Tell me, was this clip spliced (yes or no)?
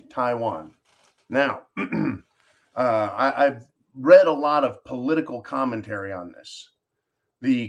no